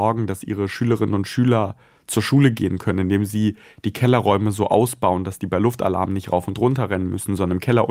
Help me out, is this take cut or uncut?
uncut